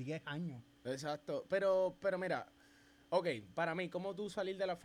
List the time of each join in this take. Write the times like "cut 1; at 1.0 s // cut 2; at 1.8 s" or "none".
none

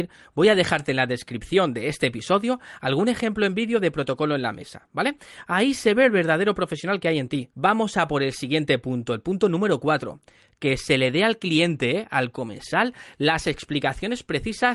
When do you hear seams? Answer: cut 1; at 7.5 s

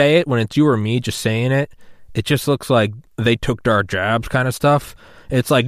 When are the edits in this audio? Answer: none

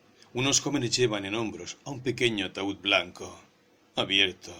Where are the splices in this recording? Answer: none

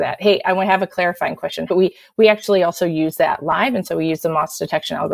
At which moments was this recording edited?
cut 1; at 1.7 s

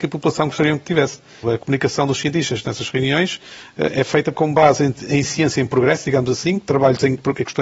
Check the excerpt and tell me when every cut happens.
cut 1; at 1.4 s // cut 2; at 4.3 s

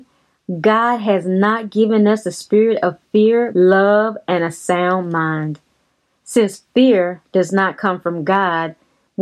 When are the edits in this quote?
cut 1; at 3.5 s

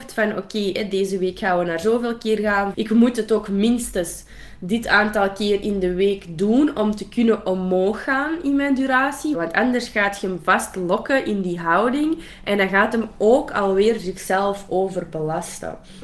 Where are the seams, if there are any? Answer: cut 1; at 2.7 s // cut 2; at 9.3 s

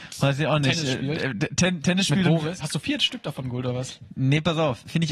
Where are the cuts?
cut 1; at 2.6 s

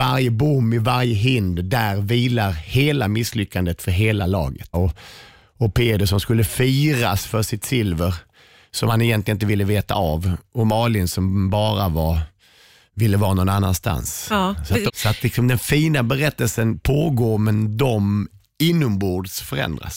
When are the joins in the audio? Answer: cut 1; at 4.7 s // cut 2; at 14.9 s

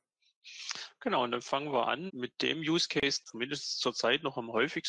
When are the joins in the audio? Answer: cut 1; at 2.1 s // cut 2; at 3.2 s

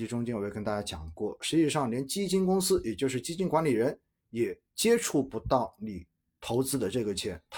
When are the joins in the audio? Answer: none

